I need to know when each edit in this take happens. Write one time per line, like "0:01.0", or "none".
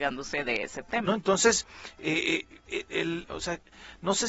0:01.1
0:03.2